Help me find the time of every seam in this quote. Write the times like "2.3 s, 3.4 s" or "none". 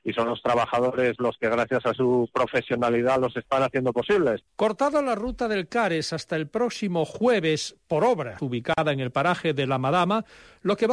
4.5 s, 8.4 s